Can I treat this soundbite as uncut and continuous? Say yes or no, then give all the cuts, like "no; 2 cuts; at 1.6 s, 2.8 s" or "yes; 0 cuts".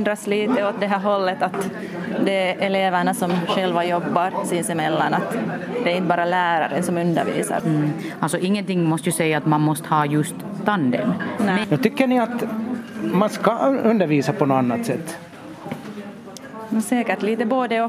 no; 2 cuts; at 7.6 s, 11.6 s